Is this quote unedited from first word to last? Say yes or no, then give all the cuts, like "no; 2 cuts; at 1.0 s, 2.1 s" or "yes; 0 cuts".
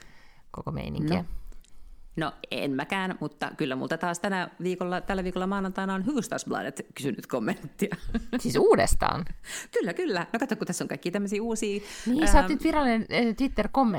yes; 0 cuts